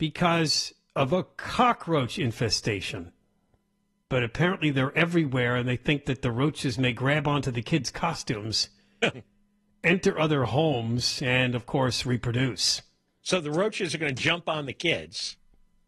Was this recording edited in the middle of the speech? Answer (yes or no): yes